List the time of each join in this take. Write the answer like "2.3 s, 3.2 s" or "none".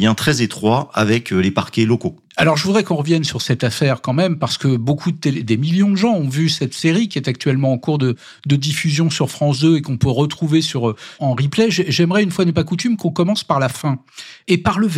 11.2 s